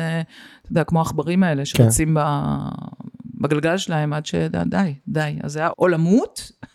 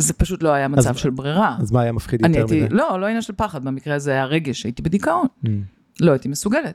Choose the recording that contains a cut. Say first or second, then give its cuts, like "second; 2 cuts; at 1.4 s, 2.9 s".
first; 1 cut; at 5.7 s